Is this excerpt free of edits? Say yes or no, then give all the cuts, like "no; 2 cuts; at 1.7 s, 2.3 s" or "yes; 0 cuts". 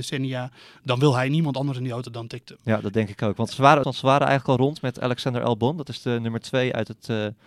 no; 1 cut; at 3.8 s